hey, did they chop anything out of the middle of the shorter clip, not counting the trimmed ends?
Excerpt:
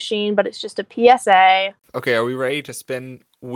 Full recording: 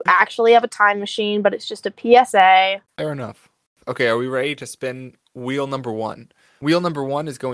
yes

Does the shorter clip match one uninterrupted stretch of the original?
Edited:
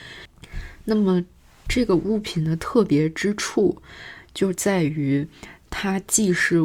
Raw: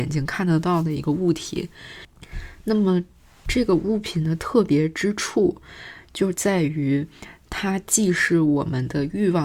yes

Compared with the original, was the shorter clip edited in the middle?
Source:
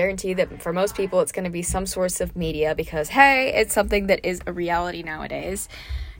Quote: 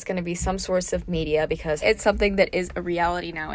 yes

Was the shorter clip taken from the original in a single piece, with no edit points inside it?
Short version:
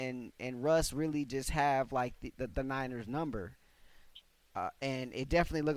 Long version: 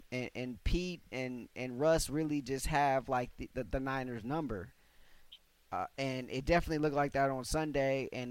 yes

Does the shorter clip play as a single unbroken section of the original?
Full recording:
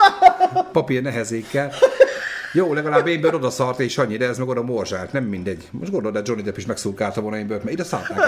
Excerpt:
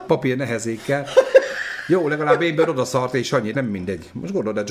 no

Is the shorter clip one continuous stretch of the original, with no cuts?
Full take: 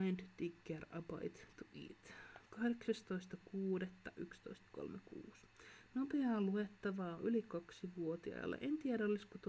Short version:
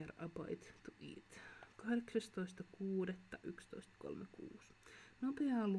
yes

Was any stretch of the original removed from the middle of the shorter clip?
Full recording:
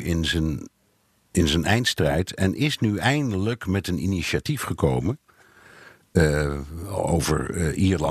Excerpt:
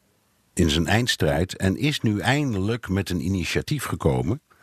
no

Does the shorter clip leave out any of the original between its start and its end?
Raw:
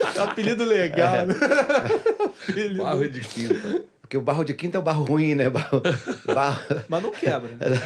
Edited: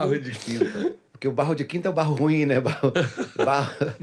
no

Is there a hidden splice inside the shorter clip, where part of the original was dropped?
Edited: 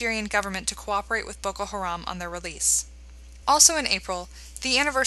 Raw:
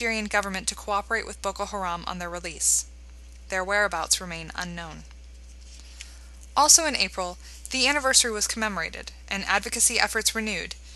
yes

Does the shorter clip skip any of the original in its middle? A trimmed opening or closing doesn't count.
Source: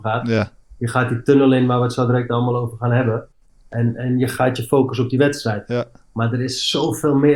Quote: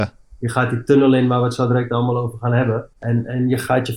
yes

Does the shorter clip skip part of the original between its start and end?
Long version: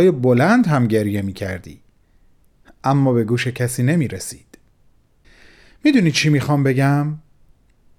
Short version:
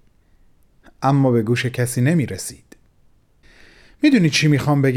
no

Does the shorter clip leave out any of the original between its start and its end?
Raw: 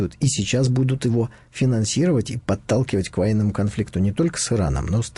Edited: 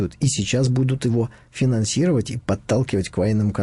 no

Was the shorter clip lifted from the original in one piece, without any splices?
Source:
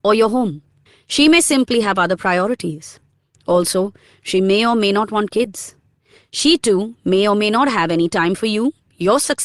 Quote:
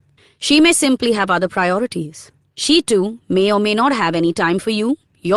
no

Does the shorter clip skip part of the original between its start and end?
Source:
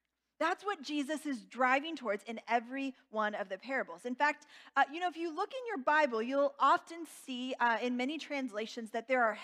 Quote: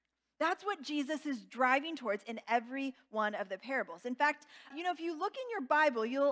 yes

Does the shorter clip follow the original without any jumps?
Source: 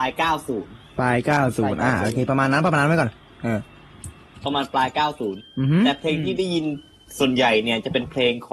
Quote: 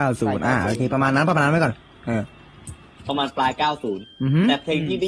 yes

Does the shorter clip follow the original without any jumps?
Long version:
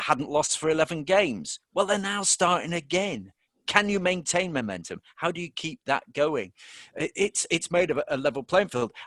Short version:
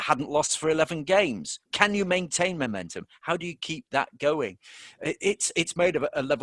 no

